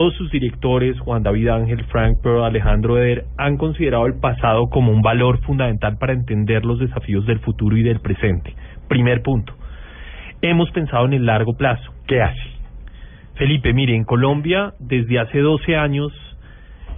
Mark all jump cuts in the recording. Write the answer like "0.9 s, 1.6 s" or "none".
12.0 s